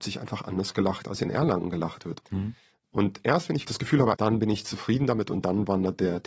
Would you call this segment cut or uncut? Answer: cut